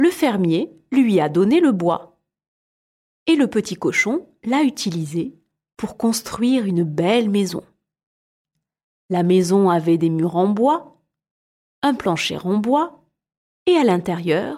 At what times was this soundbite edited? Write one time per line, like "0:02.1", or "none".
none